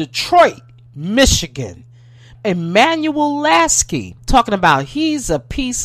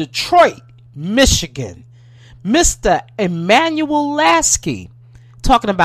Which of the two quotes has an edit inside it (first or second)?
first